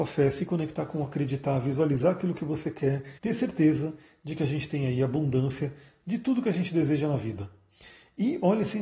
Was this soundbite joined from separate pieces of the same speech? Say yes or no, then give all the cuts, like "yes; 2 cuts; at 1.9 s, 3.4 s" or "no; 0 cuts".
yes; 1 cut; at 3.2 s